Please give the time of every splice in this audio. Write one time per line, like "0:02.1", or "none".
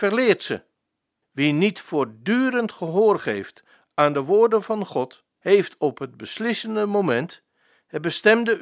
0:01.2
0:05.4